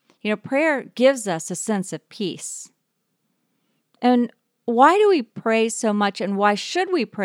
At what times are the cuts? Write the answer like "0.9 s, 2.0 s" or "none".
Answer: none